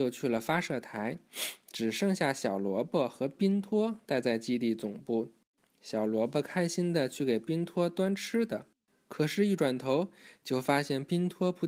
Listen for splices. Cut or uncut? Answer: uncut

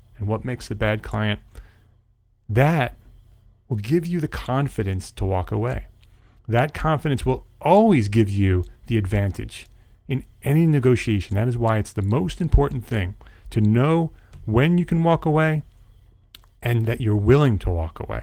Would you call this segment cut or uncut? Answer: uncut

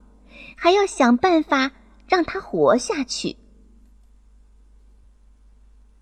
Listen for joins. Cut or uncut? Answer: cut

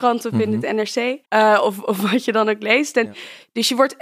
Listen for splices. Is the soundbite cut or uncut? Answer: cut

